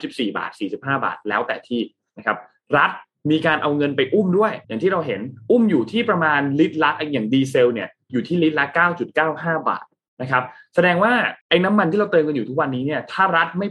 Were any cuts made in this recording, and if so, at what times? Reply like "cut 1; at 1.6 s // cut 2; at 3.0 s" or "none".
cut 1; at 4.6 s // cut 2; at 11.4 s